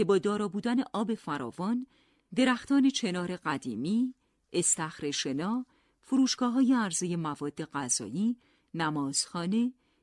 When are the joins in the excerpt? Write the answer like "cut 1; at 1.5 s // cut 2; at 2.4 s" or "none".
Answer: none